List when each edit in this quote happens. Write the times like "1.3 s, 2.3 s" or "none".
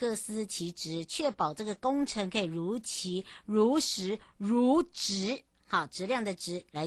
none